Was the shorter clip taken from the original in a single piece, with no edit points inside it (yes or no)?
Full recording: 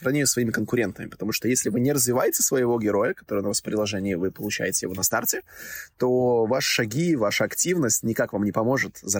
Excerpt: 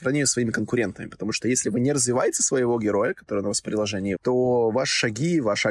no